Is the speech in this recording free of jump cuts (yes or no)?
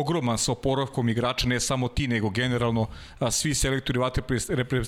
yes